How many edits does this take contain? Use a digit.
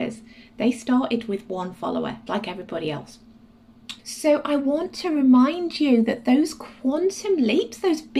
2